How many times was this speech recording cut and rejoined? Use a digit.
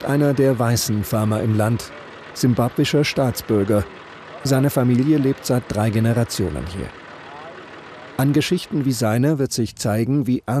1